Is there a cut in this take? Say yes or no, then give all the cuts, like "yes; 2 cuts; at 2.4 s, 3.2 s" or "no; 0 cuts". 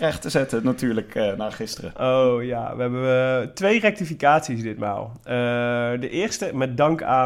no; 0 cuts